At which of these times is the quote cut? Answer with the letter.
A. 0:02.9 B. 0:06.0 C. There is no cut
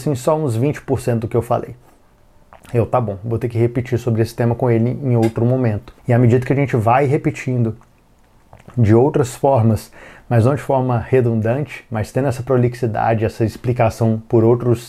B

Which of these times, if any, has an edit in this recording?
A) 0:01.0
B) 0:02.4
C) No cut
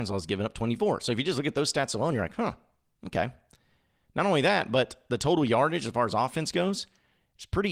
C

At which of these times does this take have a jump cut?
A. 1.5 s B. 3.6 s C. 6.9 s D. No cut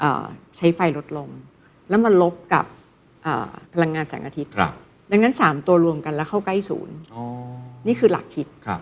B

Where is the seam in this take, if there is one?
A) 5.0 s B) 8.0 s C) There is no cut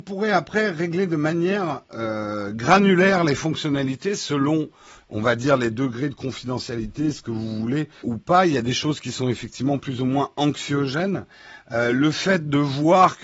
B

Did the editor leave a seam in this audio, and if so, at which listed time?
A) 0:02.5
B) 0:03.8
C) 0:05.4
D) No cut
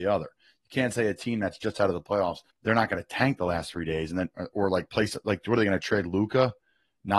A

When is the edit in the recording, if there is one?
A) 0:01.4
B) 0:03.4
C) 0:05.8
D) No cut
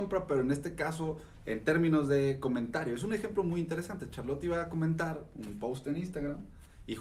D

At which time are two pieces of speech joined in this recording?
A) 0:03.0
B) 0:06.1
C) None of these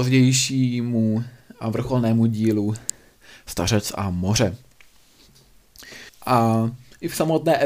B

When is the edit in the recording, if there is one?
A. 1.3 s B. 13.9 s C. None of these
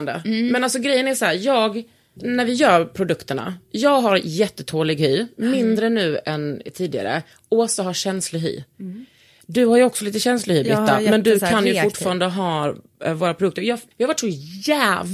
B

